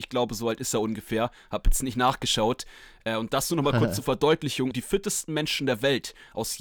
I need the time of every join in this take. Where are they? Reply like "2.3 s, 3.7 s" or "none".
4.7 s